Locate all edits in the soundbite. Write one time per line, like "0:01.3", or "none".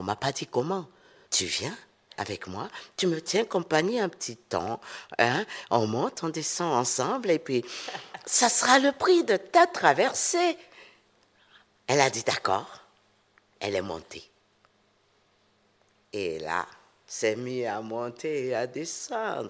0:01.3
0:17.0

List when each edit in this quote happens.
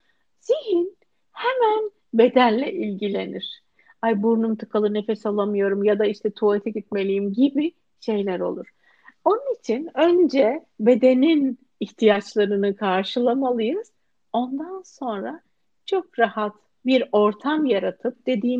none

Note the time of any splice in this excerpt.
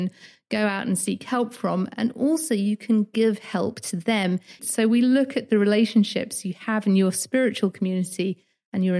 0:04.6

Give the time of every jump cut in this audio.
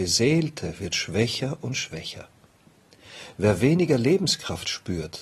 0:03.3

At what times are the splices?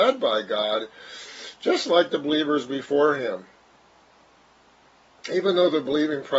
none

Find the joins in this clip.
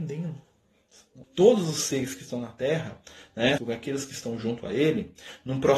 0:01.2
0:03.6

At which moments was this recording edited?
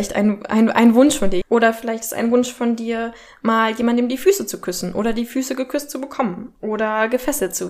0:01.4

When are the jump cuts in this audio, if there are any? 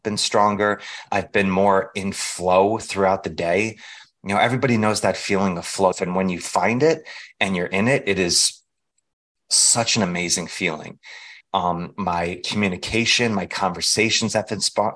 0:05.9
0:11.4

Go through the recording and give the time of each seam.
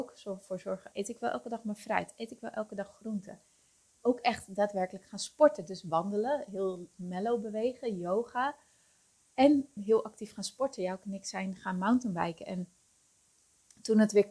0:00.9
0:04.0
0:09.8

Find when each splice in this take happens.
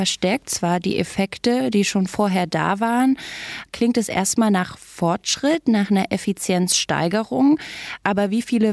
0:03.7

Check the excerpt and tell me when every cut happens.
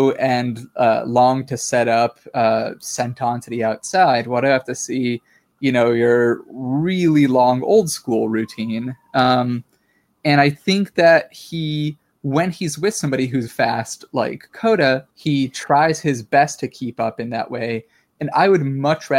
0:13.5
0:15.1

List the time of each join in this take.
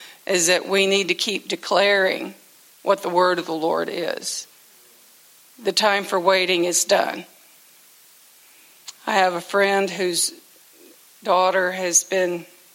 none

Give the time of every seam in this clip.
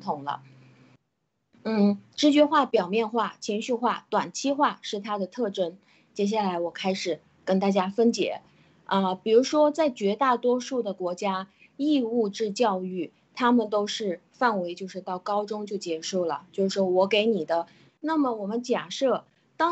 0:06.1
0:17.9

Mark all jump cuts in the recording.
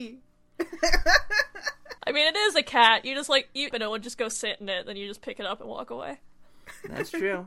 0:02.0
0:03.7

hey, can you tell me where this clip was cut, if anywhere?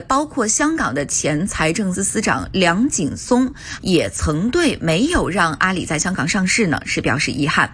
0:01.9
0:03.8

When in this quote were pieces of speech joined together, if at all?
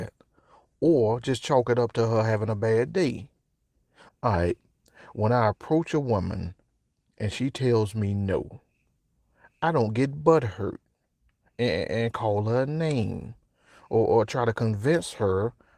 0:04.1

